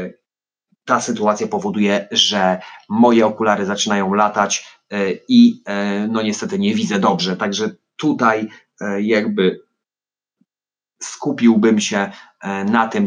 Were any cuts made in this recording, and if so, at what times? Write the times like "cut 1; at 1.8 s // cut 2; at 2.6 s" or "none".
none